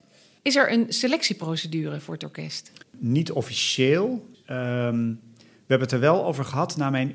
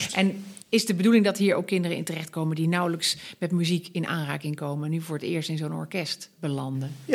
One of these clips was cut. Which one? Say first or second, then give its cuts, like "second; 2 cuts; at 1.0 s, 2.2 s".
first; 2 cuts; at 2.8 s, 4.3 s